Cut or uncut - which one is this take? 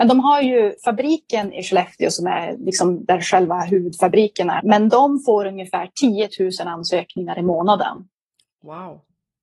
cut